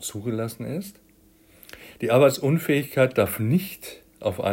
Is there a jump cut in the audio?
no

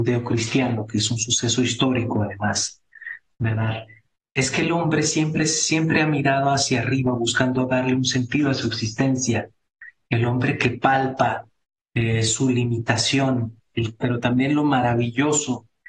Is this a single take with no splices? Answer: no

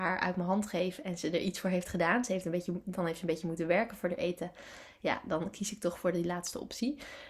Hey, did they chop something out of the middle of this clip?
no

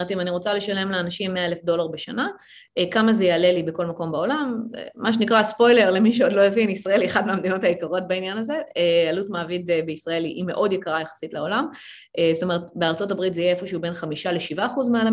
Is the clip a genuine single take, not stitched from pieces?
yes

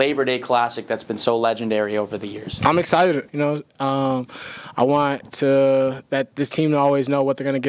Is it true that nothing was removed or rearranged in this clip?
no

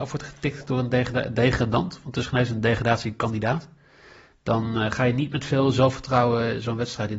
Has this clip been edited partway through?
no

